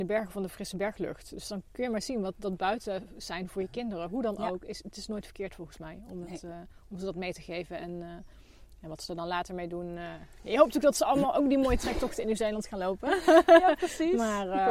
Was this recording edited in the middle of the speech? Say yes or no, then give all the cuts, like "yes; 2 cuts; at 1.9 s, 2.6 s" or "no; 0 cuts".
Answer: no; 0 cuts